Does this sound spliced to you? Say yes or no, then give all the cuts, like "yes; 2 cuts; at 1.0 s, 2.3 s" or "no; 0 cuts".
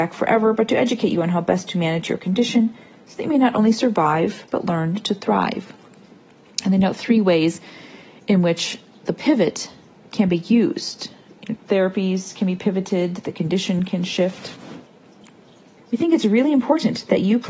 yes; 2 cuts; at 11.6 s, 15.8 s